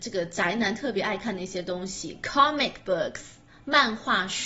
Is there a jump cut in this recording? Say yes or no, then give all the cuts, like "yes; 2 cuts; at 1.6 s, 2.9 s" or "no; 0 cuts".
no; 0 cuts